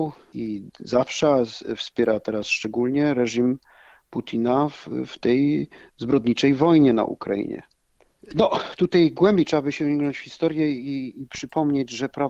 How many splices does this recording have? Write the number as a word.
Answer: zero